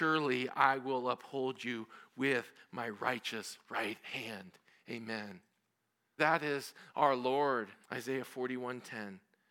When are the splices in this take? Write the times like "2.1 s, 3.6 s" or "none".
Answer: 6.2 s, 7.8 s